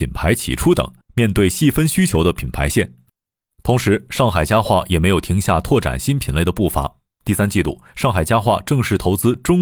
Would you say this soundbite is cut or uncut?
uncut